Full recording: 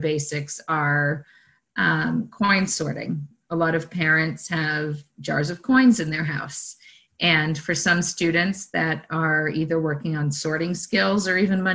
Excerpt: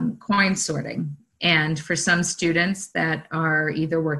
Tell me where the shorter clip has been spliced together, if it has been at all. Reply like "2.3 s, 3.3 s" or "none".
1.3 s